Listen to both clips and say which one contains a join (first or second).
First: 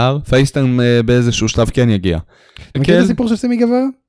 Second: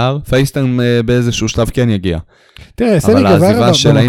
first